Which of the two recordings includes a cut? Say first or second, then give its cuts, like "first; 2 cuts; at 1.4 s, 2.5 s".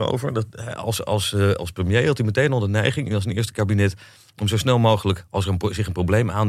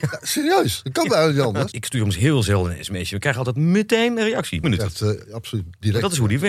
second; 2 cuts; at 1.7 s, 4.6 s